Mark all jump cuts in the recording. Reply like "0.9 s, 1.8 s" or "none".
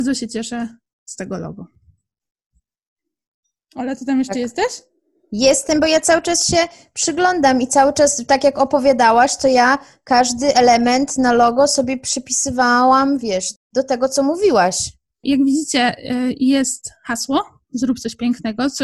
13.6 s, 15.2 s